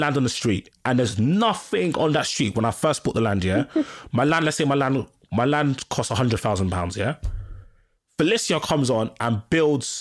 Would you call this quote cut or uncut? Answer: uncut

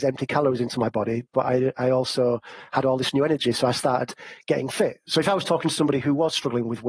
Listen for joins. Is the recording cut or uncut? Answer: cut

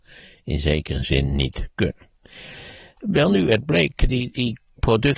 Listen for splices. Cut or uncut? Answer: uncut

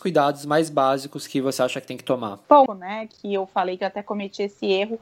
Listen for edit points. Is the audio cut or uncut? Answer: cut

